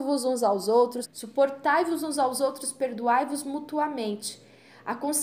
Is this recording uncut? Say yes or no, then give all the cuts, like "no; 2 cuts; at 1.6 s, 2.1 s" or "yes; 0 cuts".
no; 1 cut; at 1.0 s